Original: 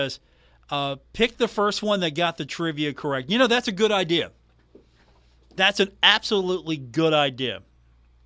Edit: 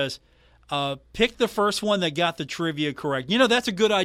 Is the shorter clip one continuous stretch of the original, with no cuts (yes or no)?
yes